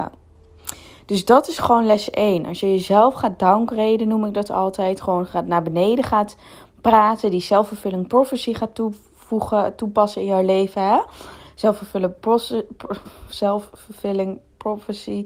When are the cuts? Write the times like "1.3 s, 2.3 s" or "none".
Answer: none